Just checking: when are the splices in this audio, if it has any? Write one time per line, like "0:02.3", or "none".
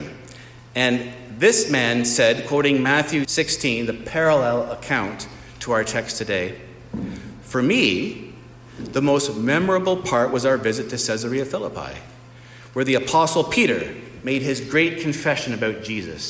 0:03.2